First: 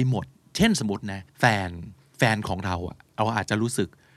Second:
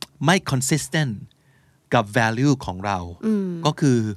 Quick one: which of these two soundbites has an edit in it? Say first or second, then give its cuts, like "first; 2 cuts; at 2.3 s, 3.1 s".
first; 1 cut; at 1.3 s